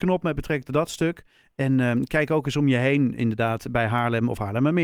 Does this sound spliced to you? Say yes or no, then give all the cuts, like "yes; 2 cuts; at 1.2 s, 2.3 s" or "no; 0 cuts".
no; 0 cuts